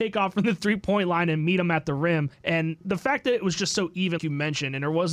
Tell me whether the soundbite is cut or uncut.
cut